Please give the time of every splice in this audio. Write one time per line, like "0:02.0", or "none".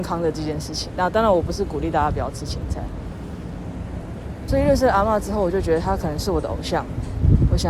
0:04.5